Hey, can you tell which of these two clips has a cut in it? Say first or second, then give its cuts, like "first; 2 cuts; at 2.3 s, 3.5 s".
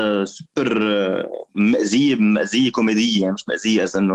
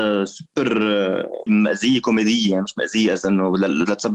second; 1 cut; at 1.5 s